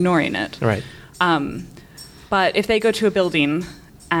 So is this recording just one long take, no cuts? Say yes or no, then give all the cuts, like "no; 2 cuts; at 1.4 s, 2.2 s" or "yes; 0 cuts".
yes; 0 cuts